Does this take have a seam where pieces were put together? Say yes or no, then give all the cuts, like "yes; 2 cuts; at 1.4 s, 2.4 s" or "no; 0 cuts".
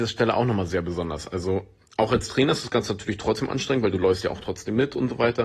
no; 0 cuts